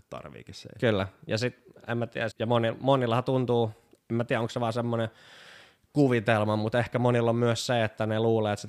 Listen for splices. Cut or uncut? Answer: cut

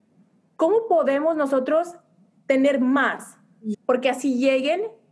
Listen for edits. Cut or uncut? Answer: cut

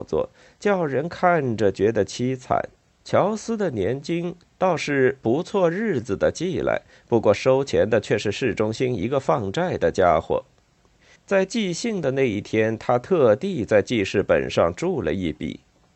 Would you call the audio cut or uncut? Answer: cut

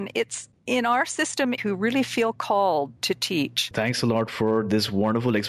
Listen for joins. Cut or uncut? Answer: cut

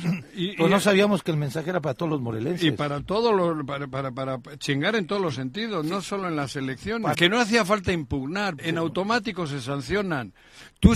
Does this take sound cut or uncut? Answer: cut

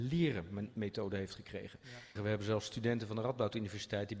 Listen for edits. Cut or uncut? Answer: cut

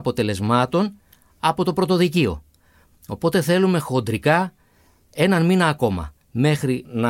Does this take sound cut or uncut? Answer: uncut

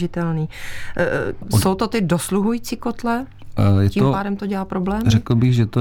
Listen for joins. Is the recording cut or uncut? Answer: cut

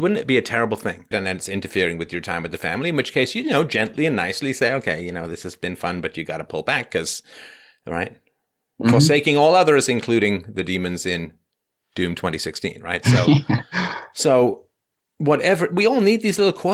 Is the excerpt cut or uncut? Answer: cut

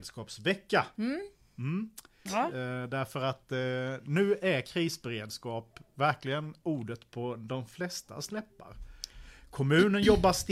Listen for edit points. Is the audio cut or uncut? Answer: cut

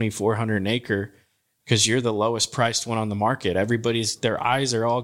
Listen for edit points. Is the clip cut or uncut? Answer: uncut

